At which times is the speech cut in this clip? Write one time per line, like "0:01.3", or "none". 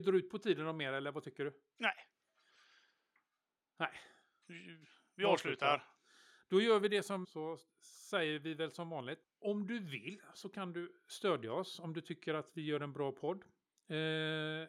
0:07.2
0:09.2